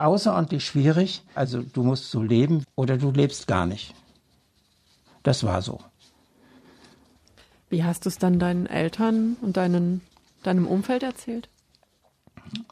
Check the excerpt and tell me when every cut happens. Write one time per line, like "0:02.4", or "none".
0:01.4
0:02.6